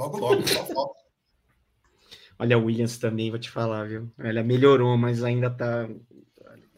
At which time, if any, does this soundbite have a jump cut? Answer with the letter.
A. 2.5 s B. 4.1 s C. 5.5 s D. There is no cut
D